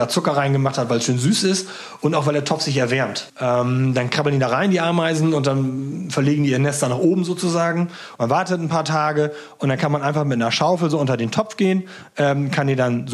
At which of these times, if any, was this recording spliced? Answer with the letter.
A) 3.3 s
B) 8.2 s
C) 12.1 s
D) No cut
D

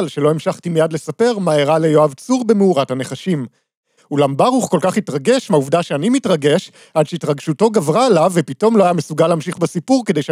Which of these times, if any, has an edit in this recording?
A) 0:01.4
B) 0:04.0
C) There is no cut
B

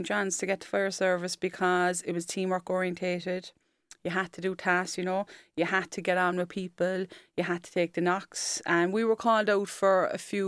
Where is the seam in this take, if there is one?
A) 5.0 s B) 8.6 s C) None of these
A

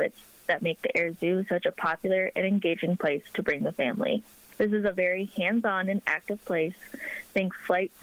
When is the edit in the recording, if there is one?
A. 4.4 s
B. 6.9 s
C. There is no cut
C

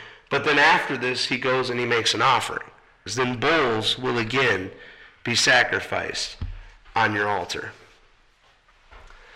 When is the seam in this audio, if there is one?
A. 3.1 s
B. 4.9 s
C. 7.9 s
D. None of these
A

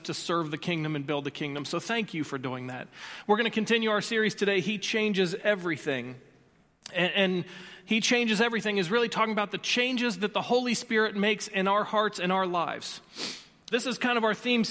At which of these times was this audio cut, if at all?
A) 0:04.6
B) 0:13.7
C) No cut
B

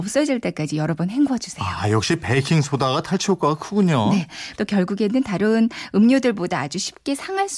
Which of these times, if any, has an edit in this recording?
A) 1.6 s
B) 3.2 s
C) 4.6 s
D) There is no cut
C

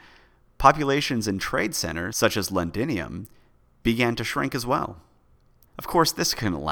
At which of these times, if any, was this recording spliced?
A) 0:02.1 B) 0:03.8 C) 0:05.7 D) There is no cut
C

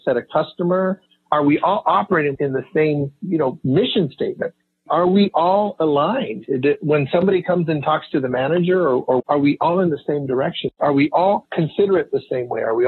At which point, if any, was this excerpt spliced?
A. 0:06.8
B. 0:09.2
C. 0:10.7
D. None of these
B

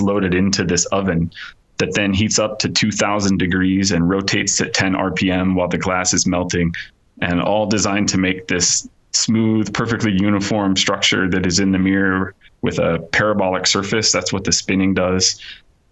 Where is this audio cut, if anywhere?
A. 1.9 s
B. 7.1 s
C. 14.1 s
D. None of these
D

